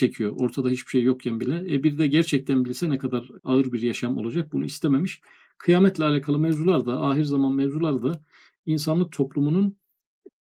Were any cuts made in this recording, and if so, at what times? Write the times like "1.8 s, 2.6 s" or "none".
none